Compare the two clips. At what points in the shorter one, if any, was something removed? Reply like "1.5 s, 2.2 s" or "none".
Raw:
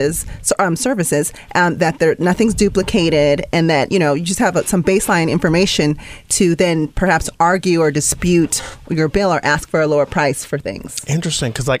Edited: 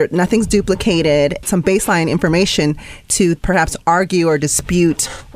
1.4 s, 3.4 s